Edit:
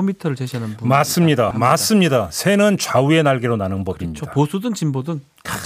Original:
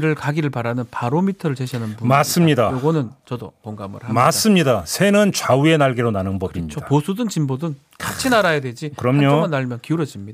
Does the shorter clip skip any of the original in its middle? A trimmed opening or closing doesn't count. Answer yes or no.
yes